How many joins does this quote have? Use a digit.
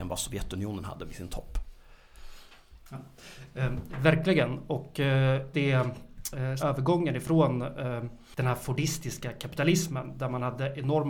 2